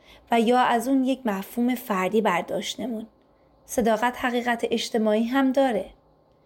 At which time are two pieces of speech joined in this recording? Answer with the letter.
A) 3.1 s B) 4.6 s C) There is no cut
C